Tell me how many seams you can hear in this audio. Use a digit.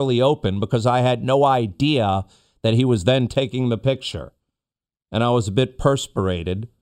0